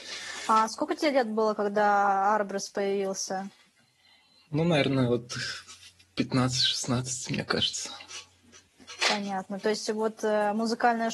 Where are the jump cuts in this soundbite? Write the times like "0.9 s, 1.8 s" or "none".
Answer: none